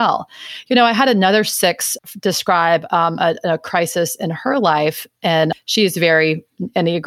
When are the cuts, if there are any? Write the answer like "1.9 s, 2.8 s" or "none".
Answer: none

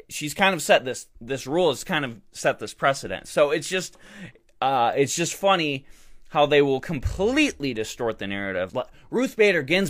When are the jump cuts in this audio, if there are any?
8.7 s

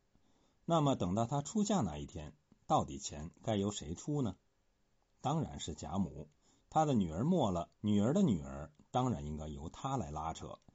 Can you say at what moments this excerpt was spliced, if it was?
6.6 s, 7.7 s

